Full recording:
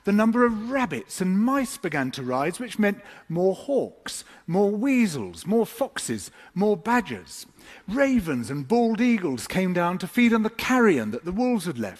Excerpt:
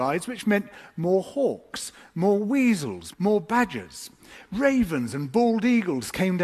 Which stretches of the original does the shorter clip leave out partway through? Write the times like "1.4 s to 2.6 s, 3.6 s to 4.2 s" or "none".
5.4 s to 6.5 s